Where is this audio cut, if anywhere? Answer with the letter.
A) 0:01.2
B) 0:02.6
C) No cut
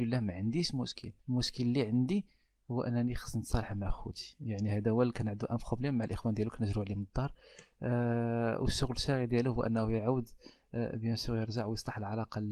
A